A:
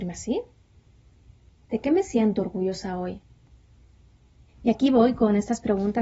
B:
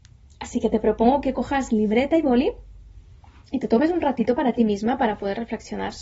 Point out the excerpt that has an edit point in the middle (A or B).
A